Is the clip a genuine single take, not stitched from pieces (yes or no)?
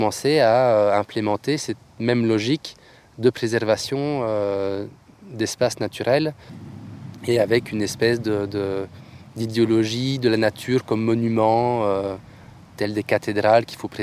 yes